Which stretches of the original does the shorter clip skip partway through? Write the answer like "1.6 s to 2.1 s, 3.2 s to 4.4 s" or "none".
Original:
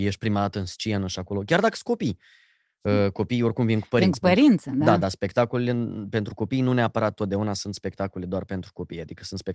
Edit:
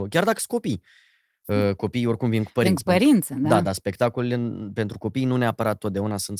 none